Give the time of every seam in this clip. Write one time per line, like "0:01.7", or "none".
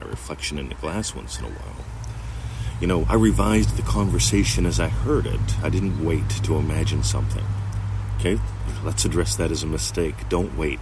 0:03.0